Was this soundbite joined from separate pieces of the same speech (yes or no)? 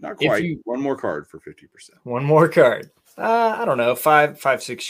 yes